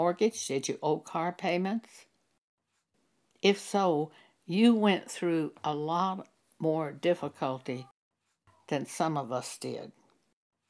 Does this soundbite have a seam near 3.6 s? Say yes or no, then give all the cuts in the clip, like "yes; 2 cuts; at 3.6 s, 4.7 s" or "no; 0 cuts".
no; 0 cuts